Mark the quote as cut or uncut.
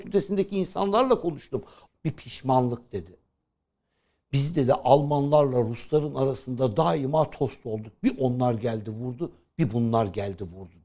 cut